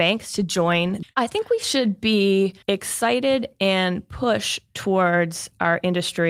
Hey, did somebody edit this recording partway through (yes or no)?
yes